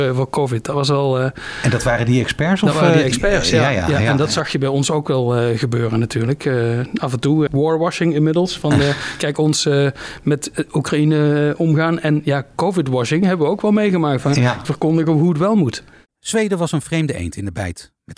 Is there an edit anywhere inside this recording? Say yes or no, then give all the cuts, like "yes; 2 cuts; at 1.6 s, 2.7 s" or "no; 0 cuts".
yes; 2 cuts; at 7.5 s, 14.6 s